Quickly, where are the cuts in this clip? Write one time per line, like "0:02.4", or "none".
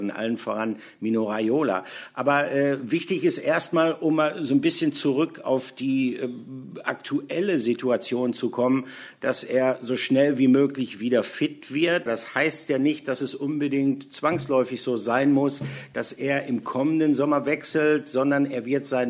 0:12.1